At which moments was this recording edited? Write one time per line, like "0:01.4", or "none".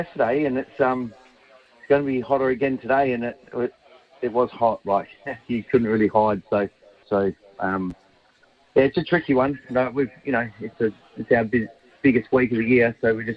0:07.0